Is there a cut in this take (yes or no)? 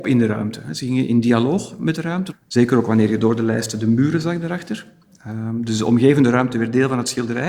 no